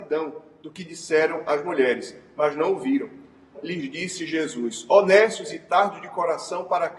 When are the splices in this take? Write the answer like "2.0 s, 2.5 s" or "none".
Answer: 3.5 s